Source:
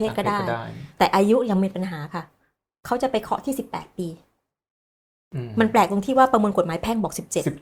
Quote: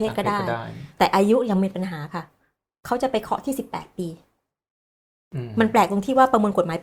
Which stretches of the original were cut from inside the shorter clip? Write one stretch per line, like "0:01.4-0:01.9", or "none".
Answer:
none